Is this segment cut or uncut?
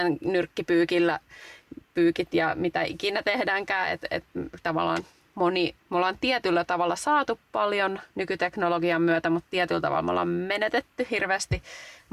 cut